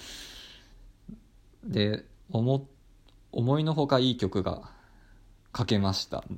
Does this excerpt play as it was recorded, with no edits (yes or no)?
yes